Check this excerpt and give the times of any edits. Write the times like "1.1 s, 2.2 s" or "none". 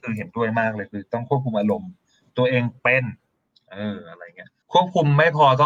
4.6 s